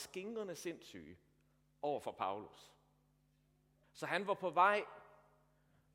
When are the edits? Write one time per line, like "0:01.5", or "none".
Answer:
0:03.8